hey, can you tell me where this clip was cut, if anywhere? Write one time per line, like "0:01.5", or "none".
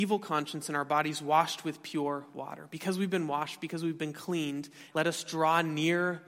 0:04.9